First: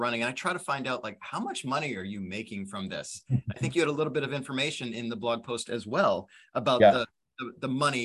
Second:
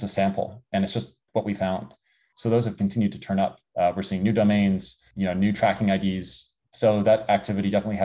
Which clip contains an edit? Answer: second; 2 cuts; at 2.3 s, 6.7 s

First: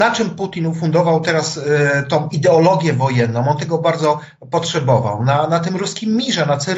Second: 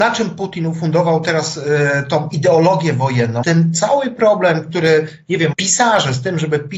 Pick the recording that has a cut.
second; 2 cuts; at 3.4 s, 5.5 s

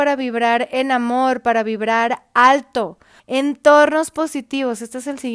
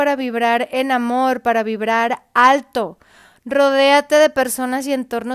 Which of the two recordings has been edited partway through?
first; 1 cut; at 3.2 s

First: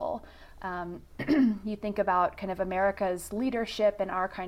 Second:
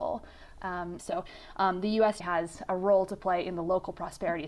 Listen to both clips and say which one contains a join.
second; 2 cuts; at 1.0 s, 2.2 s

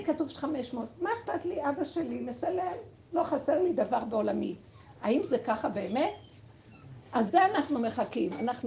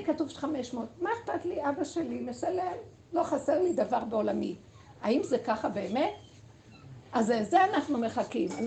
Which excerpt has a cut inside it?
first; 1 cut; at 7.3 s

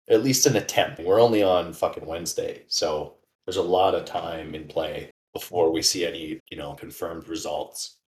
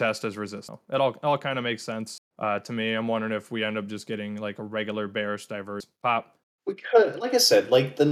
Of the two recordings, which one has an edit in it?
first; 2 cuts; at 1.0 s, 6.4 s

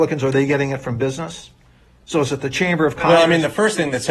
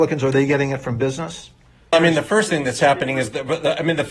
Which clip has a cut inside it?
second; 1 cut; at 1.9 s

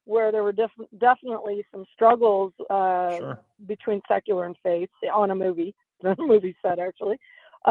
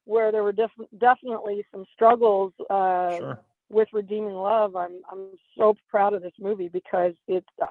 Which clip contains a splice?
second; 1 cut; at 3.5 s

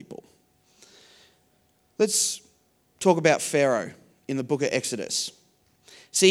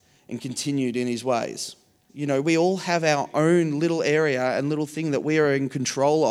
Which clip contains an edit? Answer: second; 1 cut; at 2.1 s

